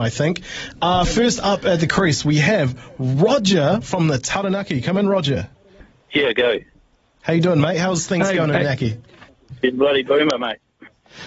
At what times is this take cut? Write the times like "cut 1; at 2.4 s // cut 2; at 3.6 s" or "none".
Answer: none